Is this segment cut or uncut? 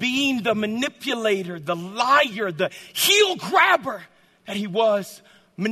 uncut